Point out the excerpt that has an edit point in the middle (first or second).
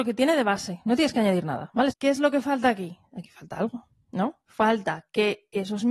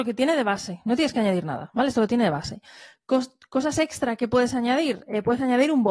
first